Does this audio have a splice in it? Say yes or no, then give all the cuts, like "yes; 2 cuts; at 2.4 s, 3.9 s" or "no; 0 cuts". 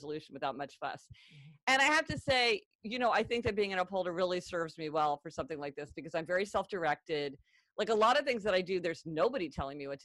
no; 0 cuts